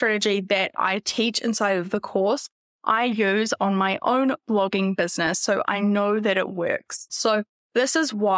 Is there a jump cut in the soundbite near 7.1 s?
yes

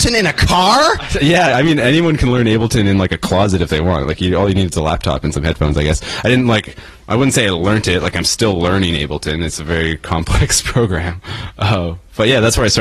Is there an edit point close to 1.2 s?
no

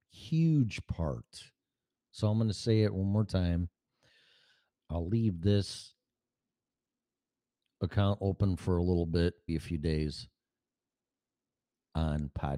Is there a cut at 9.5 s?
yes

